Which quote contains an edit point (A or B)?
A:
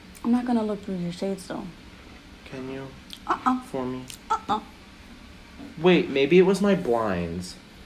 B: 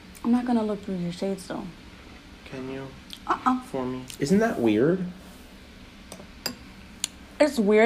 B